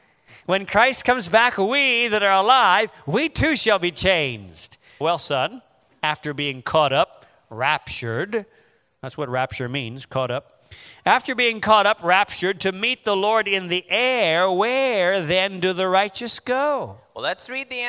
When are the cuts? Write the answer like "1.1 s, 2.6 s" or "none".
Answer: 5.0 s